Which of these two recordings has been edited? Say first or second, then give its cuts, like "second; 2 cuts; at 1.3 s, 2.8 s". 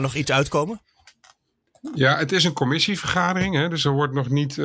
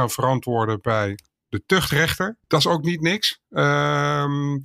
second; 1 cut; at 2.4 s